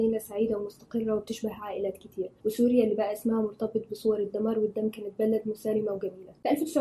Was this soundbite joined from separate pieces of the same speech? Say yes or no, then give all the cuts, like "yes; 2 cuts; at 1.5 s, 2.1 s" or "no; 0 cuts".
yes; 1 cut; at 2.4 s